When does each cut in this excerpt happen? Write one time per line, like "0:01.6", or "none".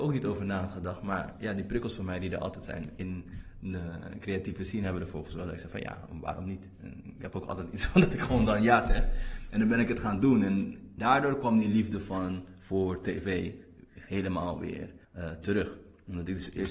0:11.0
0:15.0